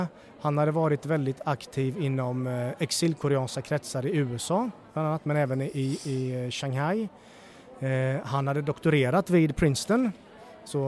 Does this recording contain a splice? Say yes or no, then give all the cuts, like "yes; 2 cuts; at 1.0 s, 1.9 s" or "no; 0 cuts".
no; 0 cuts